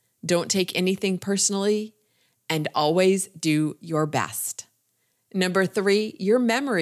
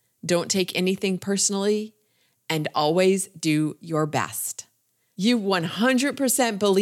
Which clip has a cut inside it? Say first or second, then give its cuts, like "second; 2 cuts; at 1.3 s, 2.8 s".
second; 1 cut; at 5.1 s